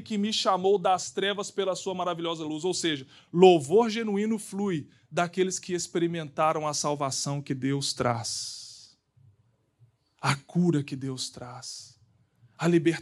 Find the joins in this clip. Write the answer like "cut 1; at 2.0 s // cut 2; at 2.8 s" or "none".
none